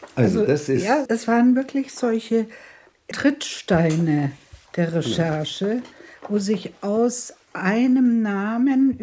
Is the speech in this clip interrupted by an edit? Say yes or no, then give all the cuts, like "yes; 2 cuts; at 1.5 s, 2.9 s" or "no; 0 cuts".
yes; 2 cuts; at 1.1 s, 3.1 s